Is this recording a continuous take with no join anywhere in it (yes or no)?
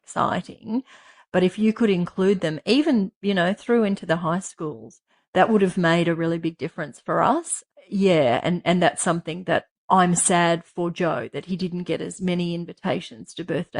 yes